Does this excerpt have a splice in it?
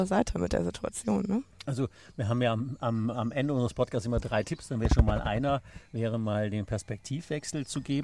no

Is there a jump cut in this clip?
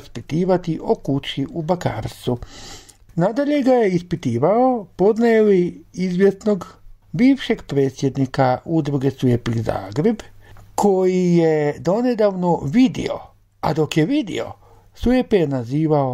yes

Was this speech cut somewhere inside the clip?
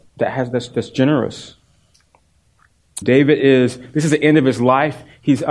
yes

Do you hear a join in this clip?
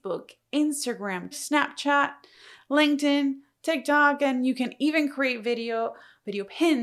yes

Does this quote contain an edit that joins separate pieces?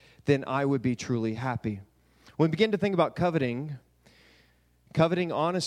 no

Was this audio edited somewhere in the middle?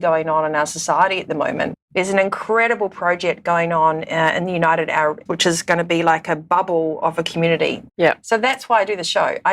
yes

